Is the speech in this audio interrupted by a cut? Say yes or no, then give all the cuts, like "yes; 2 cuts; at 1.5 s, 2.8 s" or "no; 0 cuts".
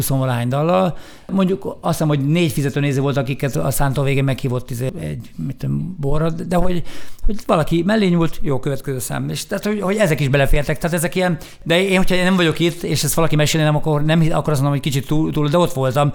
no; 0 cuts